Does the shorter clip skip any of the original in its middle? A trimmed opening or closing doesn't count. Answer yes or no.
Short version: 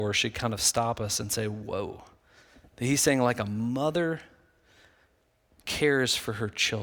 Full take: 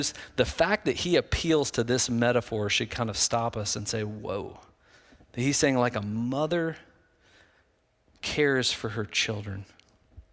no